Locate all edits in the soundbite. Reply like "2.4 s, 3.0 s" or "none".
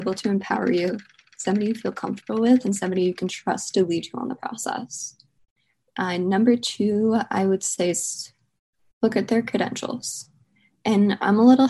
none